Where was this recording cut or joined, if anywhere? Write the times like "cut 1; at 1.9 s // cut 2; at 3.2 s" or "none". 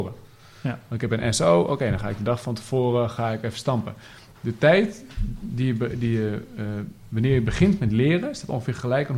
none